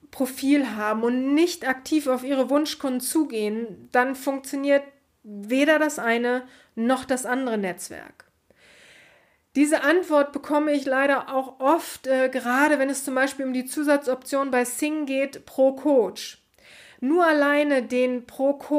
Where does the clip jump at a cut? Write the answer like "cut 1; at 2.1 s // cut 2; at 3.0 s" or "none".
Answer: none